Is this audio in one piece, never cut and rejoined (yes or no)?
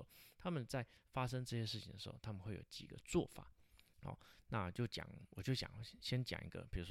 no